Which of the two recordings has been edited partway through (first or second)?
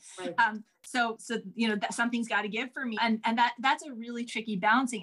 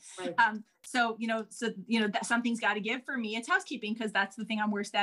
first